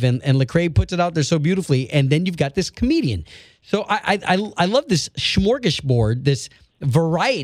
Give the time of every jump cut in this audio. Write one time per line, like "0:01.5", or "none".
none